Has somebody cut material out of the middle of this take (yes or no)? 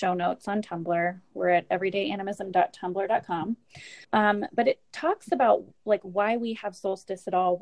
yes